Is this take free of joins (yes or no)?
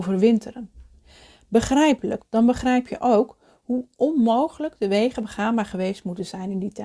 no